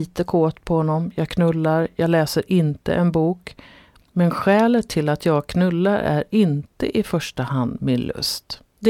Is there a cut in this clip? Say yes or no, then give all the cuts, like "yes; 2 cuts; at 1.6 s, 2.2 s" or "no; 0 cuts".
no; 0 cuts